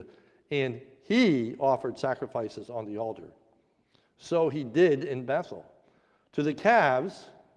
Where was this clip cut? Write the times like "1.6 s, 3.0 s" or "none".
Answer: none

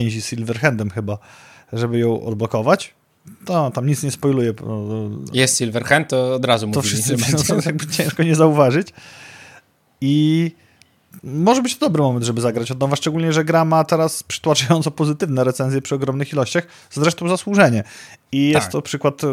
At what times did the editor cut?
none

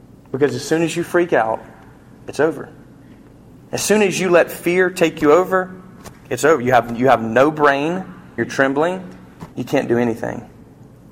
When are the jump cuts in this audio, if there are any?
8.4 s, 9.5 s

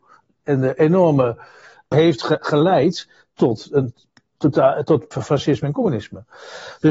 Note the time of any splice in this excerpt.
1.9 s

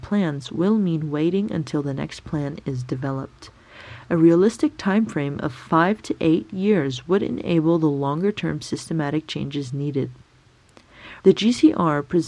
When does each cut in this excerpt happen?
11.2 s

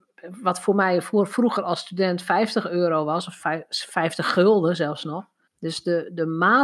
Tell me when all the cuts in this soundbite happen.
5.5 s

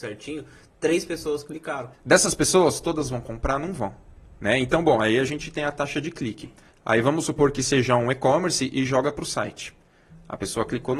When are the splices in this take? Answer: 1.9 s

